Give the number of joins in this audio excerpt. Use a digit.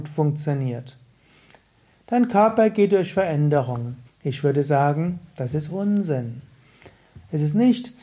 1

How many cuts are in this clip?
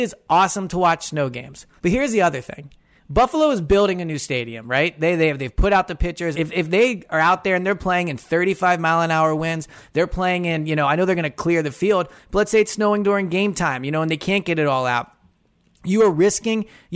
2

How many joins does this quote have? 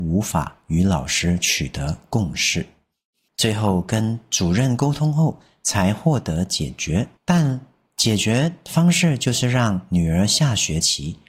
2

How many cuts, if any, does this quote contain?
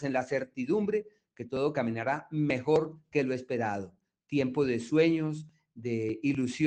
0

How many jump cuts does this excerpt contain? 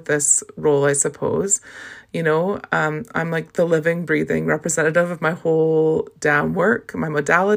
0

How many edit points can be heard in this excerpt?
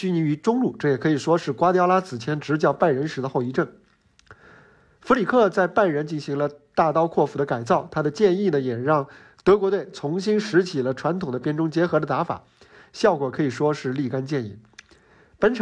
0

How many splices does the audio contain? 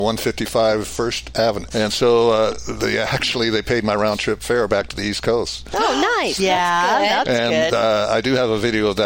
2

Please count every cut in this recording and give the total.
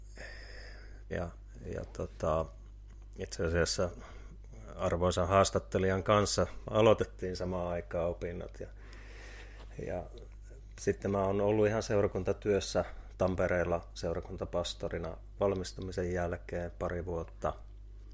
1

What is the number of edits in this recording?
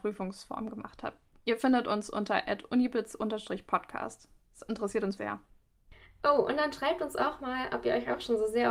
1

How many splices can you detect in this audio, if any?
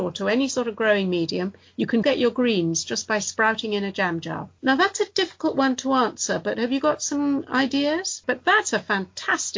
3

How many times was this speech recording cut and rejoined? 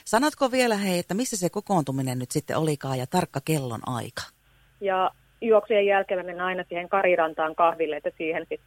1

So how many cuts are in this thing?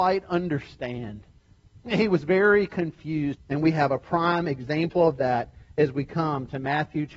1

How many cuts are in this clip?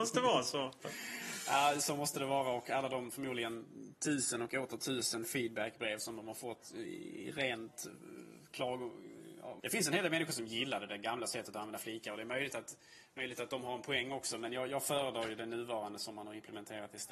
1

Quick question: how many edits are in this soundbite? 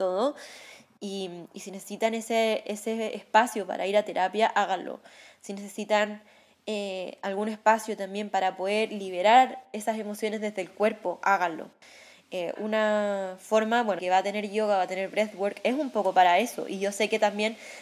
2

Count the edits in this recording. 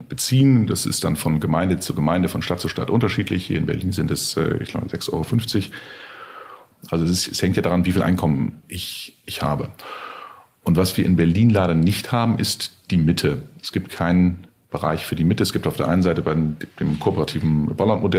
1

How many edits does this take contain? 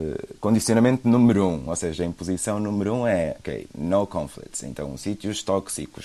0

